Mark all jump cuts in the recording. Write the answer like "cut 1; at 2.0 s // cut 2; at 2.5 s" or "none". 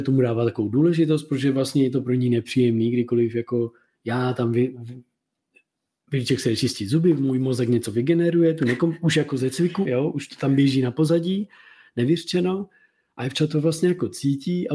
cut 1; at 9.9 s